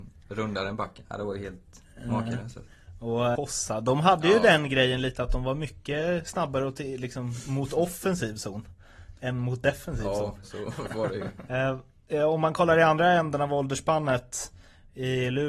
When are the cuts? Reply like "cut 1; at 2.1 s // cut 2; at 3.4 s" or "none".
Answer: cut 1; at 3.4 s // cut 2; at 10.4 s